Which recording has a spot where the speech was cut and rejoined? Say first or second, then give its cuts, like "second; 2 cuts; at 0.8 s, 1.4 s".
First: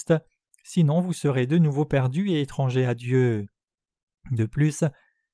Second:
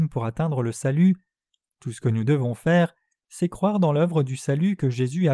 first; 1 cut; at 4.2 s